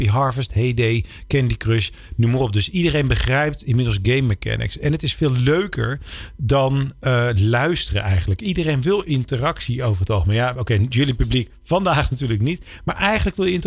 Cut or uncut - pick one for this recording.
uncut